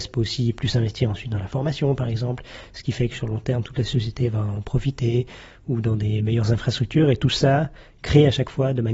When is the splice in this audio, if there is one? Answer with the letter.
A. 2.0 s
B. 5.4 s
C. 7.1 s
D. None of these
D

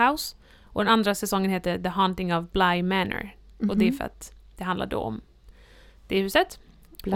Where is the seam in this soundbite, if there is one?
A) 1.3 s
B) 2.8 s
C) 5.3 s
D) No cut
D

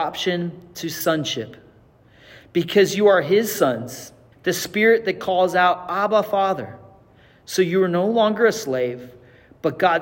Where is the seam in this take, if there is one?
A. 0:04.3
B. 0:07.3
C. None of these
A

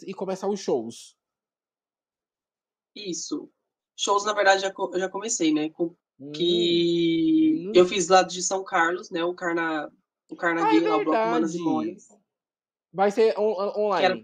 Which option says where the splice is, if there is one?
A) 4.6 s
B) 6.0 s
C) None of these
B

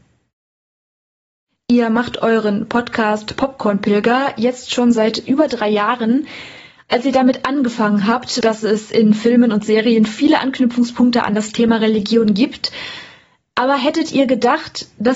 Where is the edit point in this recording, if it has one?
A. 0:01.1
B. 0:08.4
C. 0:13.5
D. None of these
B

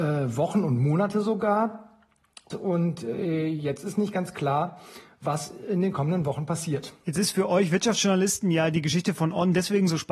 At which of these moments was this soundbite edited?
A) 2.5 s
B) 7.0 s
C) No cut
A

